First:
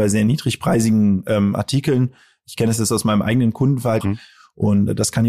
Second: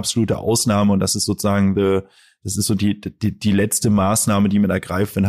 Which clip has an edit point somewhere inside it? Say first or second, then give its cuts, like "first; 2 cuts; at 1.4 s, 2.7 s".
first; 1 cut; at 4.0 s